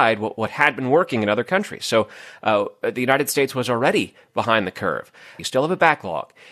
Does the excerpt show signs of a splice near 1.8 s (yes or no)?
no